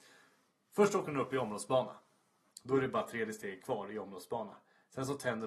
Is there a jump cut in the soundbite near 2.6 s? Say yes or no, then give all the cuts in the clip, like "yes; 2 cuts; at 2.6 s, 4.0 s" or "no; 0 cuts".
no; 0 cuts